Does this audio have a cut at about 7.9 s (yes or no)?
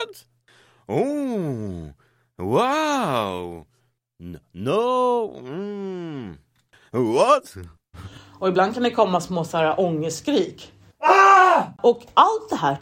yes